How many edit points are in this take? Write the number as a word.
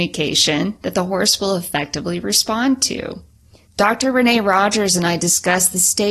one